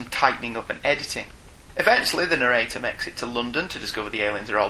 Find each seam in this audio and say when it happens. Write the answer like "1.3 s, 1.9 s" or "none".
none

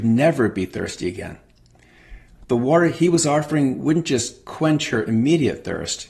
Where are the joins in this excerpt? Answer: none

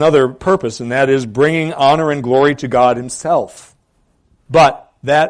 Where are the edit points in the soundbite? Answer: 4.4 s

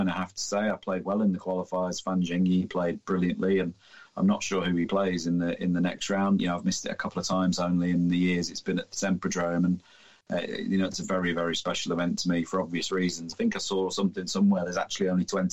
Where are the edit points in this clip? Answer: 6.4 s, 13.3 s

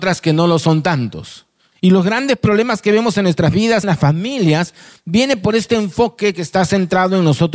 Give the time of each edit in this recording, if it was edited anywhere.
1.7 s, 3.8 s

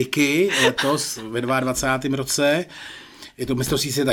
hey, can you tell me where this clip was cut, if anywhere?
none

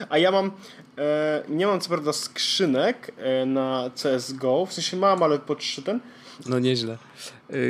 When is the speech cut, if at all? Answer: 1.5 s, 6.4 s

